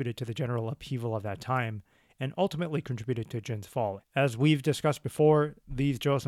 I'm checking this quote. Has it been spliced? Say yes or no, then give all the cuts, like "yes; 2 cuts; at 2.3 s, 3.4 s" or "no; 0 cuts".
yes; 1 cut; at 4.0 s